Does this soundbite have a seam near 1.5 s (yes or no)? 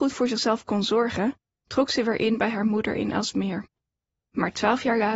no